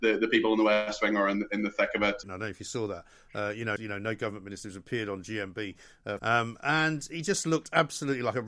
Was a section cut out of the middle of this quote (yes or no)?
yes